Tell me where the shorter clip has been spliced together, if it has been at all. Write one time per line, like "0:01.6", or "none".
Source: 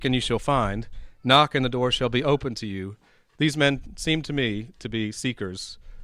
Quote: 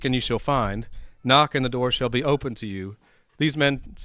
none